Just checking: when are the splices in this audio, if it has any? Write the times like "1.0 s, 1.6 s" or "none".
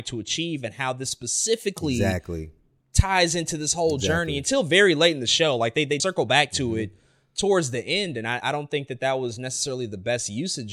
6.0 s, 8.4 s